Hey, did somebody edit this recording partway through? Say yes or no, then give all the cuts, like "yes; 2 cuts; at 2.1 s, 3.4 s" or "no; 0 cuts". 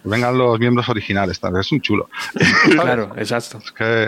yes; 1 cut; at 2.8 s